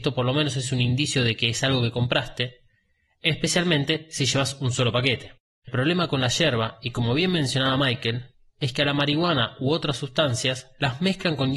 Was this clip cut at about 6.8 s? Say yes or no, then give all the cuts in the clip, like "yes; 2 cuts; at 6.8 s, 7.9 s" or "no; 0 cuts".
no; 0 cuts